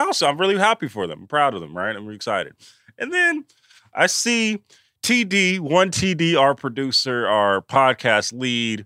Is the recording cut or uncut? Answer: uncut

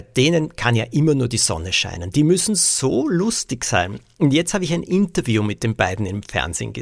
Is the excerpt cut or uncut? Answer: uncut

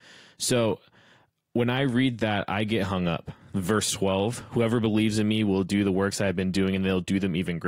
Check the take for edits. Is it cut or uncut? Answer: uncut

